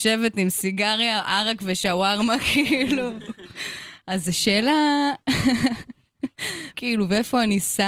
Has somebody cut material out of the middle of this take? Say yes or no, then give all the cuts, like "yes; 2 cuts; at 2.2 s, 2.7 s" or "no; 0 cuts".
yes; 1 cut; at 6.7 s